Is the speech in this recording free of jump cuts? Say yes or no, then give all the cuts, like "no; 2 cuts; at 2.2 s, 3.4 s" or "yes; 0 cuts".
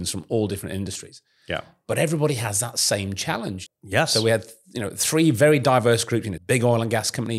no; 2 cuts; at 3.7 s, 6.4 s